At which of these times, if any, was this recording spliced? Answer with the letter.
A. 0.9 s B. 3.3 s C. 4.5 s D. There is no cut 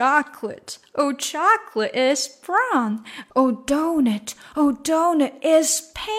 B